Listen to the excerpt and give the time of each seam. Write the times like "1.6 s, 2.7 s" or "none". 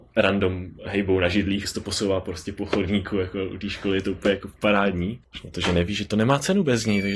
1.7 s, 5.2 s